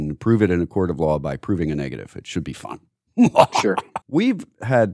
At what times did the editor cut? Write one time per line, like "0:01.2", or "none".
0:04.0